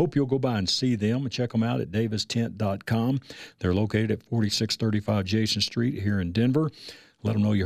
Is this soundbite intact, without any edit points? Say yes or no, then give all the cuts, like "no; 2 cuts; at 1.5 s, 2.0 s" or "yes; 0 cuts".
yes; 0 cuts